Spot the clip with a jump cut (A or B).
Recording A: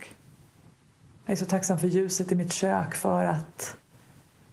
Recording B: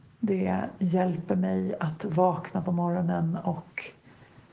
A